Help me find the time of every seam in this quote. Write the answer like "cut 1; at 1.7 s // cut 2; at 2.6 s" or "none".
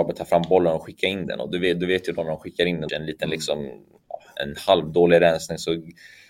cut 1; at 2.9 s